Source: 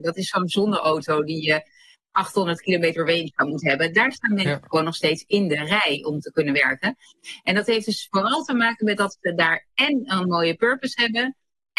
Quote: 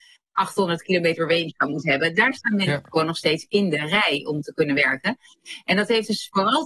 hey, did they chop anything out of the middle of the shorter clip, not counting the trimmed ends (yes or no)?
no